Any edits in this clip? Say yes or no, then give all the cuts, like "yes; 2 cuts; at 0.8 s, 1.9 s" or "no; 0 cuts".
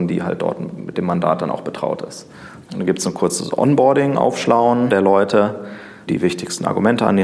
yes; 2 cuts; at 2.6 s, 6.1 s